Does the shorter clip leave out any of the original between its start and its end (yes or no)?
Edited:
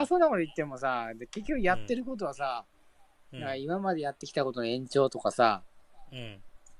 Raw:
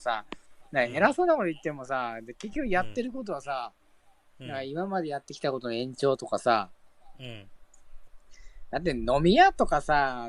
no